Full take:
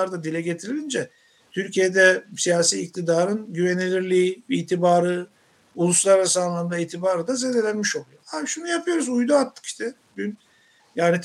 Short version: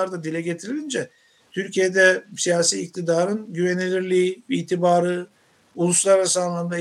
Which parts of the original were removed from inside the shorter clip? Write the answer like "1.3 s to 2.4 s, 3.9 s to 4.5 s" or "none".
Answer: none